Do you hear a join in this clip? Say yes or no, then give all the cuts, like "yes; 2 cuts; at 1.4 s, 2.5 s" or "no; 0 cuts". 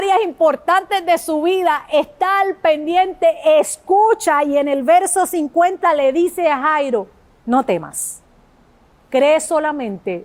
no; 0 cuts